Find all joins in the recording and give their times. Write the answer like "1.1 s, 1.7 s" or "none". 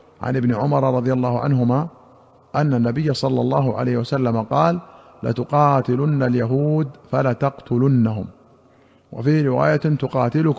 none